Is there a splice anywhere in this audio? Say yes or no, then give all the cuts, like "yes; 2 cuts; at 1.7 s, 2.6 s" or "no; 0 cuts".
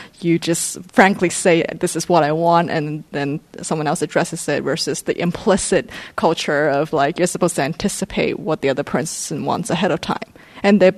no; 0 cuts